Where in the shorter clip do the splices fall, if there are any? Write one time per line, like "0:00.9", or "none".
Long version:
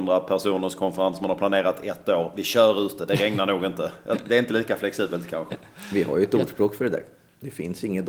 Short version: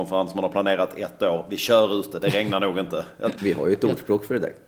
0:03.4